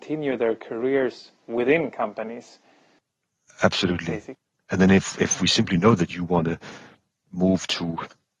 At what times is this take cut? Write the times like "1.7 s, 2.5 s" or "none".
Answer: 4.5 s